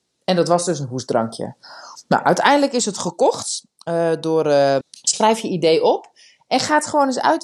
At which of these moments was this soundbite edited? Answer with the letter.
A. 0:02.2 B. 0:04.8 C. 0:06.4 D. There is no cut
B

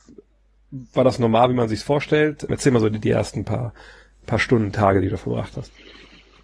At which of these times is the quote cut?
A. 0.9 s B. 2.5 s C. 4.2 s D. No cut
B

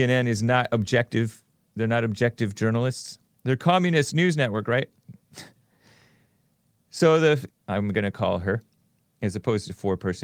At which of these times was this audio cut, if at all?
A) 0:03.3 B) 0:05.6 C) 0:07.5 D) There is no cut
C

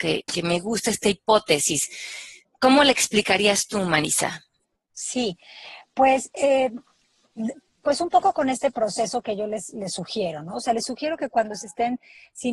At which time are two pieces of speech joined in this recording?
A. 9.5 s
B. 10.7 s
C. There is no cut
C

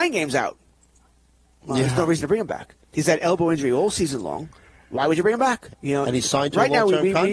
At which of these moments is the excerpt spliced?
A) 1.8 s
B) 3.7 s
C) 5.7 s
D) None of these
C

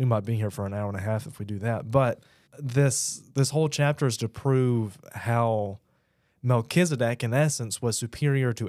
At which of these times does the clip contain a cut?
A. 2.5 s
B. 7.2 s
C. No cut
A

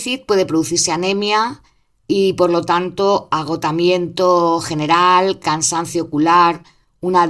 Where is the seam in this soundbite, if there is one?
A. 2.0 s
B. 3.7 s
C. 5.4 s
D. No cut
D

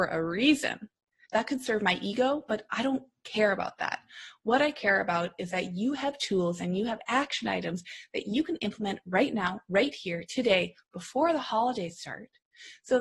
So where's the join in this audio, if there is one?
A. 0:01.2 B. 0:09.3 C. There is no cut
A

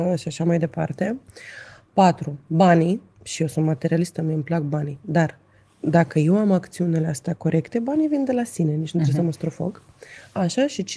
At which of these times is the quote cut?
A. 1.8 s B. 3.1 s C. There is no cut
C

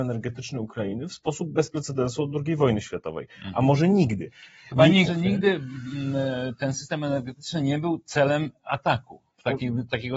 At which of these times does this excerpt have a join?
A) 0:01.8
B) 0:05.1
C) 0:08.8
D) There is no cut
B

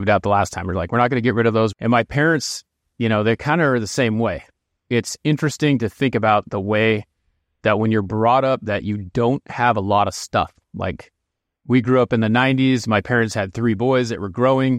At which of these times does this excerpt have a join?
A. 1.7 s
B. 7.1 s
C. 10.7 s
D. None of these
A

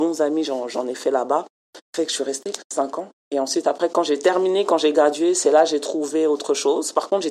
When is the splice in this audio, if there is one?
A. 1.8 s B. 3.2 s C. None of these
A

